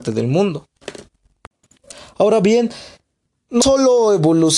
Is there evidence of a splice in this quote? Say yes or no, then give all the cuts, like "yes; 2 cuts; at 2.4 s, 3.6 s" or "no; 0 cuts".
no; 0 cuts